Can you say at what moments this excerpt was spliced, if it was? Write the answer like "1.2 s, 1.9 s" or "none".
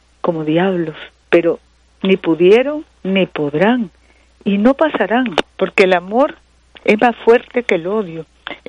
1.2 s, 5.5 s